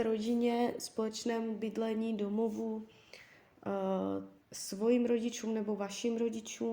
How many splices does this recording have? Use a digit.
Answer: 1